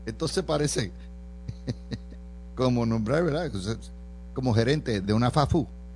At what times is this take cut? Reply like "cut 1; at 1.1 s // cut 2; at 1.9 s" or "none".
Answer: cut 1; at 2.5 s // cut 2; at 5.0 s